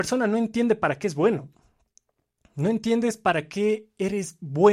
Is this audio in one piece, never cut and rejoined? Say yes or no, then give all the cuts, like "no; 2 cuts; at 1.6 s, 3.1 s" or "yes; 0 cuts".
yes; 0 cuts